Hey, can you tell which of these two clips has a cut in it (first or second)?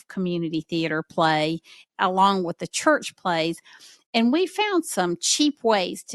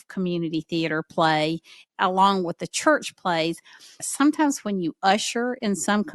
second